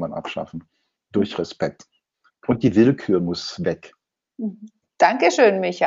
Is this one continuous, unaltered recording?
no; 2 cuts; at 2.3 s, 4.8 s

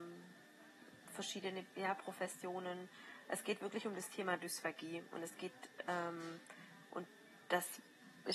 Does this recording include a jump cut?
yes; 1 cut; at 1.7 s

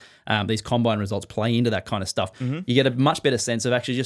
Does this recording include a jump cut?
yes; 1 cut; at 2.3 s

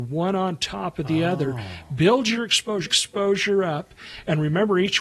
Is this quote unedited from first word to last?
no; 1 cut; at 2.8 s

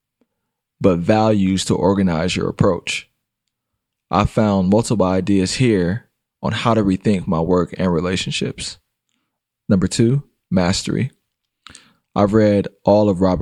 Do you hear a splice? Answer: no; 0 cuts

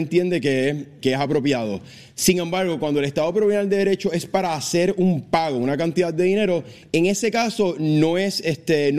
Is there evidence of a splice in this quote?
yes; 1 cut; at 1.0 s

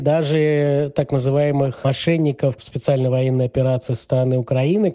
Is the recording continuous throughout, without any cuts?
no; 1 cut; at 2.6 s

